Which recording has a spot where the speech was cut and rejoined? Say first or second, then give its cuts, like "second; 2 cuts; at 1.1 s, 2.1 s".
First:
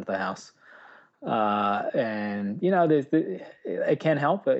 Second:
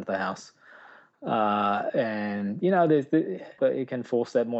second; 1 cut; at 3.6 s